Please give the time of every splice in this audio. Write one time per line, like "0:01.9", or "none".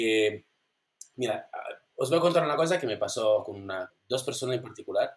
0:01.1
0:03.9